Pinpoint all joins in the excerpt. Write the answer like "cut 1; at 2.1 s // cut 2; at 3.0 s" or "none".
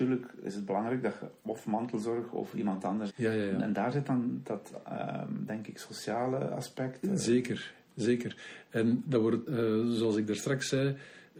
cut 1; at 3.1 s // cut 2; at 9.5 s

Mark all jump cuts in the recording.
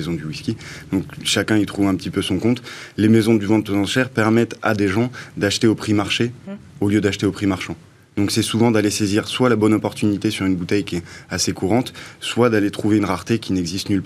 none

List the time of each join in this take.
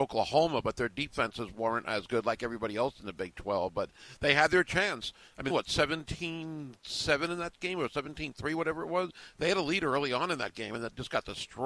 cut 1; at 5.5 s

